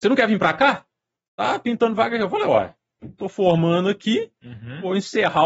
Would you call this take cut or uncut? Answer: uncut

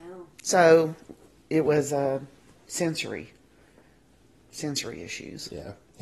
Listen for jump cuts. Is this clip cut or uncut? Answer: uncut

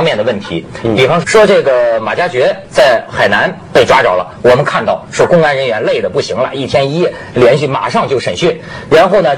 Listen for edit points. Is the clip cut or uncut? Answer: cut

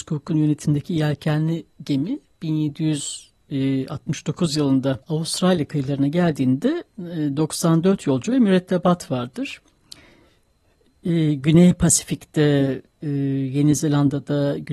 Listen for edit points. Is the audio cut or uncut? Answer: cut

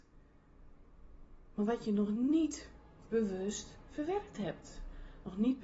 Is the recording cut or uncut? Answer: uncut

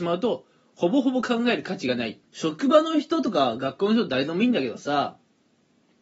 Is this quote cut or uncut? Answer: cut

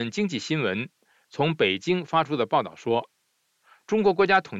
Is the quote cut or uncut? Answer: uncut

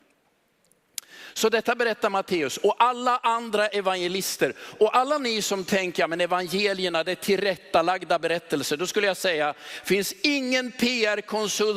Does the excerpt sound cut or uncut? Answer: uncut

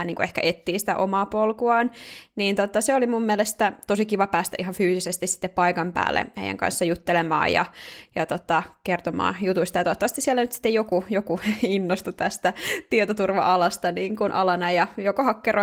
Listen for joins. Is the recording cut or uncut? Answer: uncut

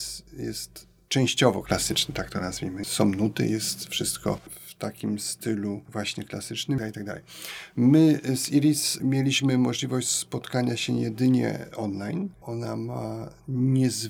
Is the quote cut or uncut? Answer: cut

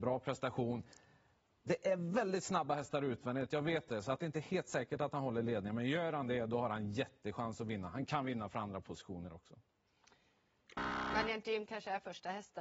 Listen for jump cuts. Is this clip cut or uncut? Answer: uncut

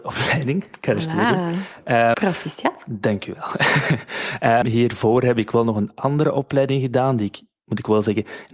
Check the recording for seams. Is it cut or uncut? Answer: cut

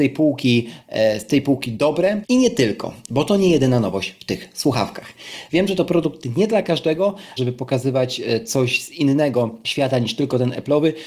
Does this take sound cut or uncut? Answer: cut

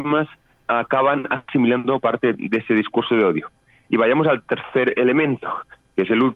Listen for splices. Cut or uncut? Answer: uncut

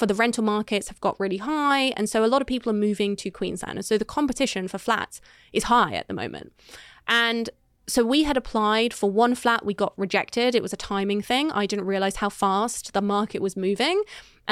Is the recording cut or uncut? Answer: uncut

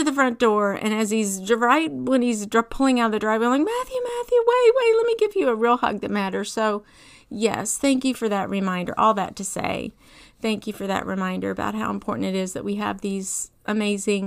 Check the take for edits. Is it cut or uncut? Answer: uncut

